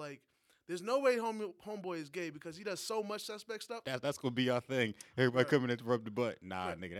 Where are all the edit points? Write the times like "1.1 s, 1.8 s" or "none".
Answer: 3.8 s